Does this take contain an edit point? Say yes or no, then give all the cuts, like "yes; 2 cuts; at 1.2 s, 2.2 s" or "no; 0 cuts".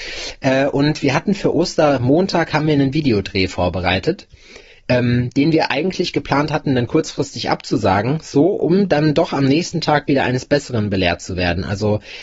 no; 0 cuts